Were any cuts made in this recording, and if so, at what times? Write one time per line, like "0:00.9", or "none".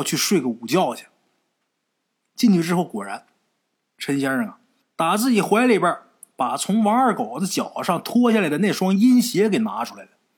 0:02.3